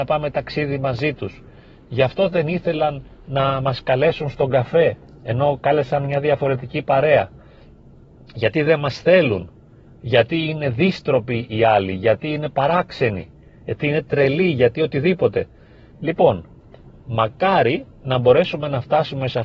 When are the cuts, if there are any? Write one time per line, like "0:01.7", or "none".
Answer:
0:15.9